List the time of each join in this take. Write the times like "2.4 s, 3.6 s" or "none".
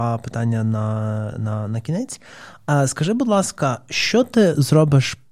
none